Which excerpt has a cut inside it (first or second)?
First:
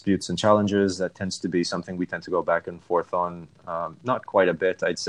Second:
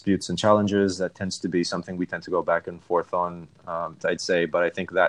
second